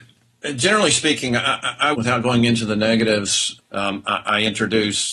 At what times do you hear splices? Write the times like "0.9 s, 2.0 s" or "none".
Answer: 1.9 s, 3.6 s

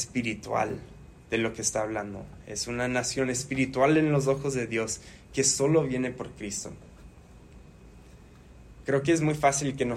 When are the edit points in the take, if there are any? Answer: none

